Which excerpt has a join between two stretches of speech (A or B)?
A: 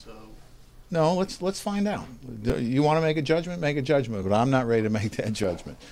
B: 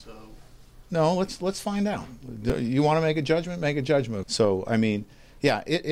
B